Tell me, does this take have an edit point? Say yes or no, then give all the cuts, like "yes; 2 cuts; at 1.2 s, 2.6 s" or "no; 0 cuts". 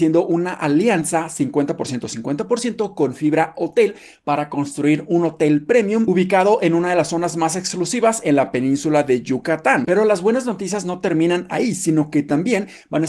yes; 1 cut; at 9.8 s